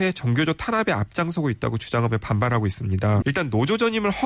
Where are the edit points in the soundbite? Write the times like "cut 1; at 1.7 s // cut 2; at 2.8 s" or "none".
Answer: cut 1; at 3.2 s